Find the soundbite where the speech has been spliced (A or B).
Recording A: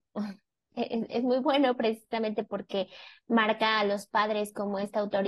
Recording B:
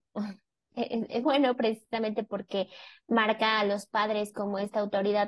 B